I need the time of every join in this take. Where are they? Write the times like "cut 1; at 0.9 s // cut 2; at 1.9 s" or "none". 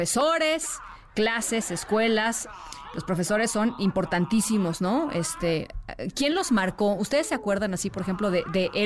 none